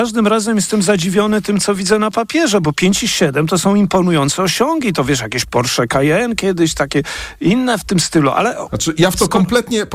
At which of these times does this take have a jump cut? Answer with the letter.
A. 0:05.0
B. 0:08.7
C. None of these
C